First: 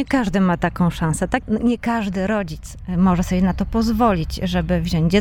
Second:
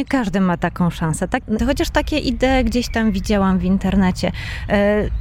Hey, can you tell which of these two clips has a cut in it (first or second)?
second